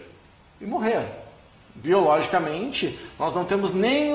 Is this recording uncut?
yes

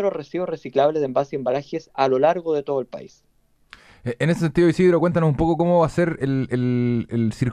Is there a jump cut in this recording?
no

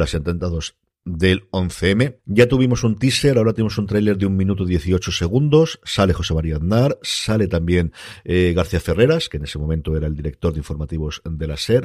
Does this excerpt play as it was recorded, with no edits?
yes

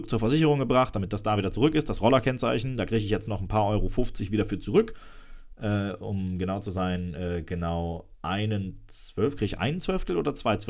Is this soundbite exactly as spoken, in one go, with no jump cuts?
no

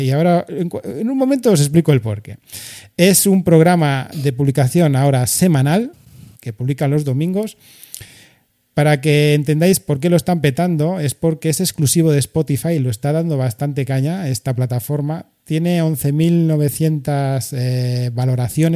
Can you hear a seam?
no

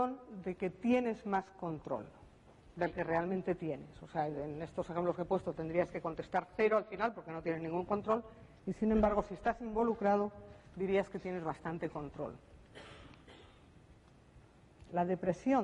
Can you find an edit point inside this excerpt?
no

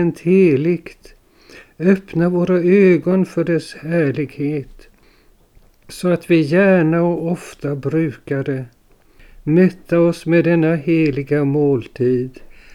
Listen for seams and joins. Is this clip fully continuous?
yes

